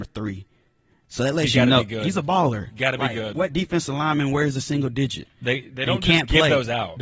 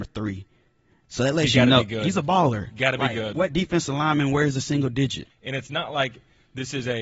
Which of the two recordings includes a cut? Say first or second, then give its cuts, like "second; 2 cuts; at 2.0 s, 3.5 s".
second; 1 cut; at 5.3 s